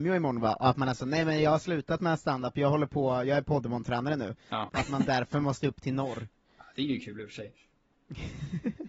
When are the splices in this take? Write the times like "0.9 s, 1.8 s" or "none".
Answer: 4.7 s

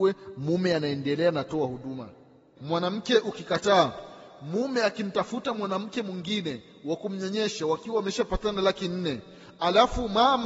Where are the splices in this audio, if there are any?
2.6 s

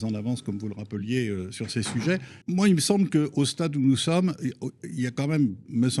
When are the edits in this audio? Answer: 2.4 s

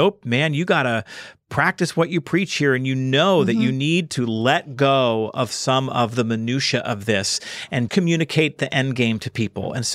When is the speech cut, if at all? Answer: 7.9 s

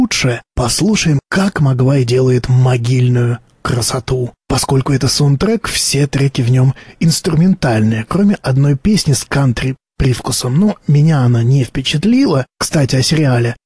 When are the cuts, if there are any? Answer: 4.4 s, 12.5 s

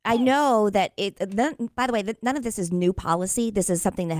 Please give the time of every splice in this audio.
none

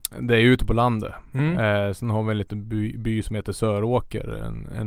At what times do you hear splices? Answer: none

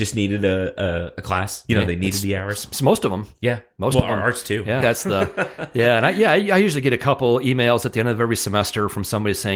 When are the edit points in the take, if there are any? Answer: 4.8 s

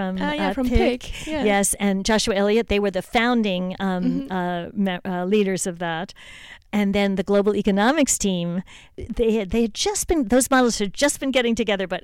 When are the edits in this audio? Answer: none

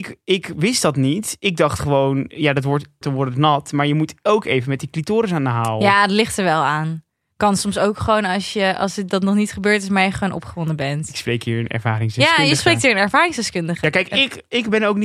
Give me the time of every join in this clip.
3.0 s

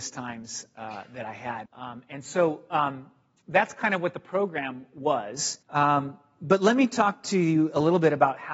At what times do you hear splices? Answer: 1.7 s, 5.6 s

